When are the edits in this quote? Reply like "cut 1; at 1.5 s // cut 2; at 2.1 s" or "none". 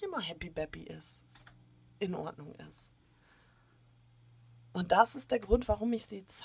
none